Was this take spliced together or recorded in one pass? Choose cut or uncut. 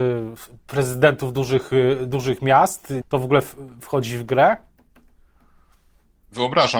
cut